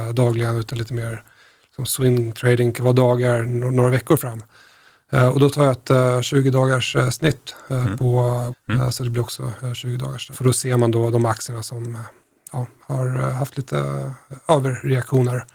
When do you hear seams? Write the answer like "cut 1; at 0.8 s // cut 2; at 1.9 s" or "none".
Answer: cut 1; at 8.5 s // cut 2; at 10.3 s